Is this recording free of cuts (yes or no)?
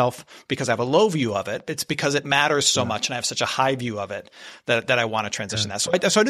yes